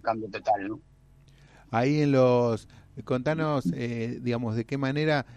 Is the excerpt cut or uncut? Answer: uncut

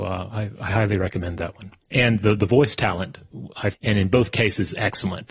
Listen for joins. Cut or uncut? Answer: cut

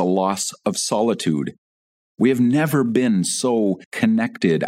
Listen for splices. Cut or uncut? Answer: uncut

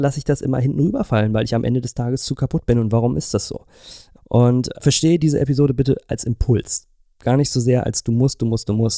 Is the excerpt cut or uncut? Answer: cut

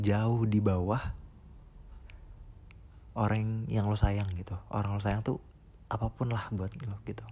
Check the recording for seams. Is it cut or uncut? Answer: cut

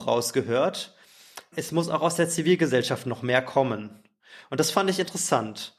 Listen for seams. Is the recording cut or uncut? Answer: cut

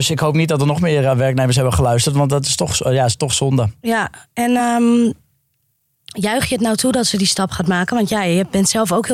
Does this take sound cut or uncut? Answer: uncut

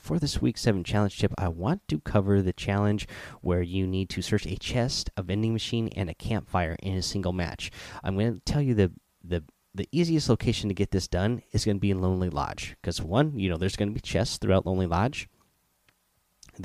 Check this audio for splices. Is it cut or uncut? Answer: uncut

